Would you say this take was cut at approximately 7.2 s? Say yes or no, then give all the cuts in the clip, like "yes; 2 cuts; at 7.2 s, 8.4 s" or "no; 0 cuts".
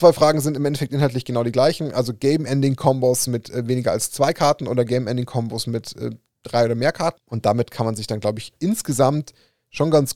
yes; 1 cut; at 7.2 s